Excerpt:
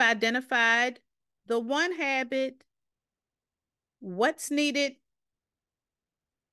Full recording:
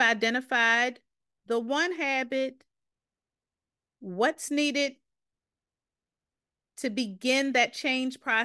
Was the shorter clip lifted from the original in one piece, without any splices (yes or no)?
yes